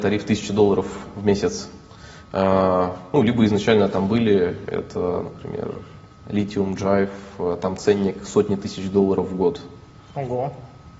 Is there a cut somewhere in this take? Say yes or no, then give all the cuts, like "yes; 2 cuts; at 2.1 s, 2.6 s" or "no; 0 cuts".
no; 0 cuts